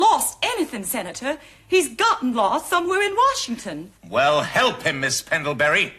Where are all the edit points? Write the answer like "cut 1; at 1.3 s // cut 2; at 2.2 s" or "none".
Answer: cut 1; at 4.0 s